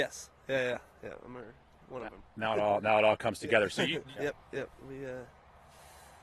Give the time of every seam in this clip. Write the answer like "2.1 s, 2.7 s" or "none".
4.1 s